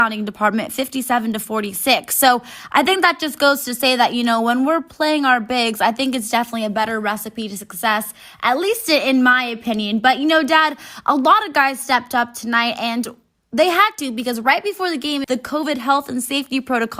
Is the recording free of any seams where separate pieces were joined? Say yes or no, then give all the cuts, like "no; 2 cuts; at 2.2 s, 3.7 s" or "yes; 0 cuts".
no; 1 cut; at 15.2 s